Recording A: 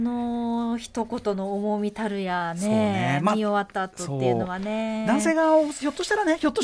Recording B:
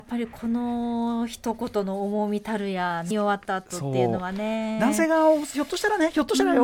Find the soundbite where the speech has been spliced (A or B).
B